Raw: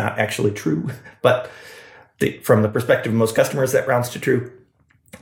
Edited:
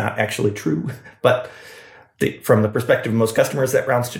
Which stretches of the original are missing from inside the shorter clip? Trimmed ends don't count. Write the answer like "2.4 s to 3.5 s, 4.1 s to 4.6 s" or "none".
none